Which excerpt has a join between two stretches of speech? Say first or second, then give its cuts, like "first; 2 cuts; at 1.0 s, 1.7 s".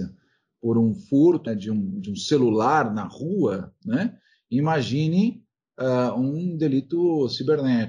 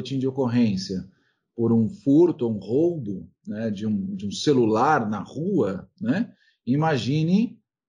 first; 1 cut; at 1.5 s